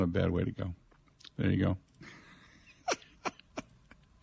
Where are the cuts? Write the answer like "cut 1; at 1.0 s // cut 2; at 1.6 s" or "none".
none